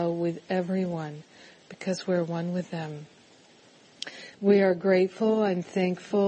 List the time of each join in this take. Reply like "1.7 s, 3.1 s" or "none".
4.3 s